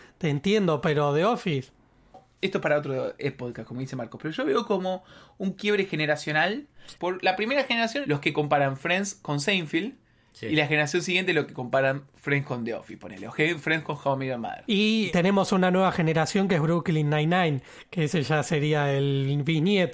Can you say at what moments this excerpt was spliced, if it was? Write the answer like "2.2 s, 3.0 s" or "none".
6.9 s

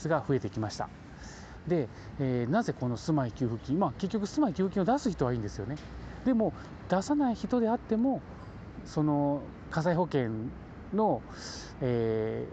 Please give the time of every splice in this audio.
none

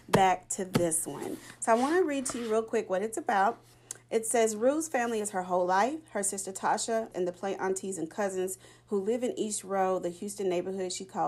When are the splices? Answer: 7.1 s

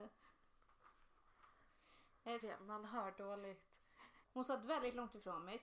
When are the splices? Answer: 2.4 s, 4.2 s

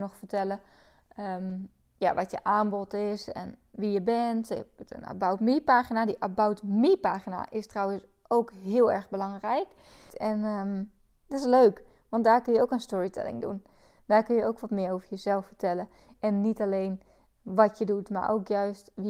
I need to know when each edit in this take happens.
10.1 s

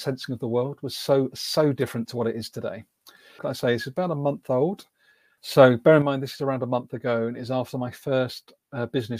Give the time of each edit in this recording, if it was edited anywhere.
3.4 s, 5.4 s

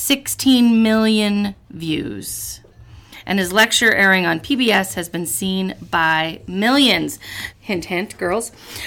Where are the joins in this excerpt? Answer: 7.5 s

